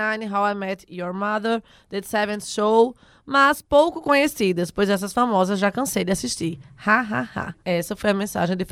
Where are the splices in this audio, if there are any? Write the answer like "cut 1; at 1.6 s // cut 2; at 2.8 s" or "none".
cut 1; at 7.6 s